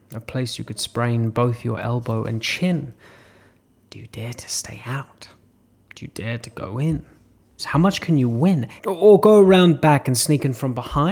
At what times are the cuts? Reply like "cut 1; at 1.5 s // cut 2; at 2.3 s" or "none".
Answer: cut 1; at 7.6 s // cut 2; at 8.8 s